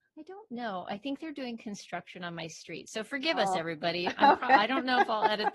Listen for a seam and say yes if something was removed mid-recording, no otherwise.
no